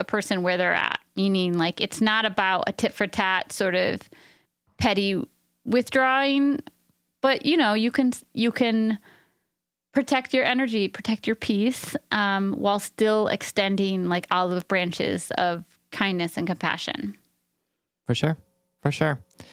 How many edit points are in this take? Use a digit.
0